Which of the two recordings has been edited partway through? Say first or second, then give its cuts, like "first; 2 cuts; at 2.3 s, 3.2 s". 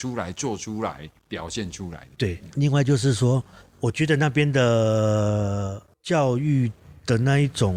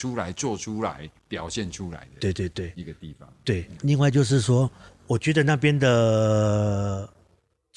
first; 2 cuts; at 2.1 s, 5.9 s